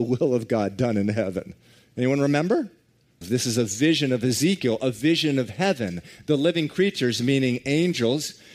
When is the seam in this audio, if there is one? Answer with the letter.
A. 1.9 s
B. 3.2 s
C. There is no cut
B